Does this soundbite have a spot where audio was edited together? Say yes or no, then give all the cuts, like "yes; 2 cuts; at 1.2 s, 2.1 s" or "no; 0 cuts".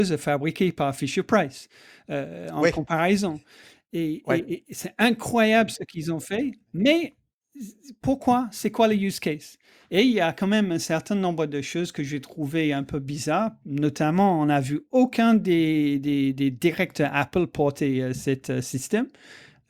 no; 0 cuts